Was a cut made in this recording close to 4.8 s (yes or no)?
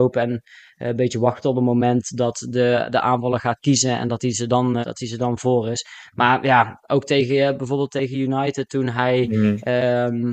yes